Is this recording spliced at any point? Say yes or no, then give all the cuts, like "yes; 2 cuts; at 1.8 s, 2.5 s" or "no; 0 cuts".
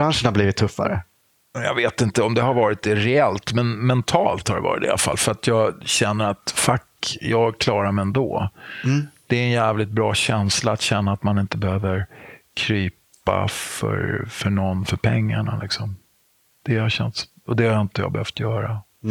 no; 0 cuts